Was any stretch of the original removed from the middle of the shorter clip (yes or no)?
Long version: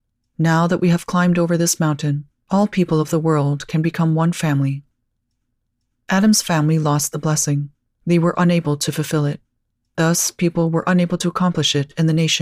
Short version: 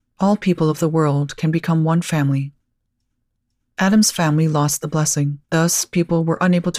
yes